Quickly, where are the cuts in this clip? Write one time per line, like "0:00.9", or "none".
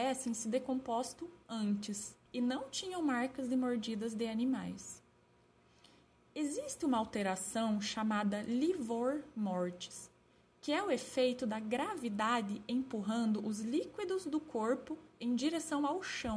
0:02.3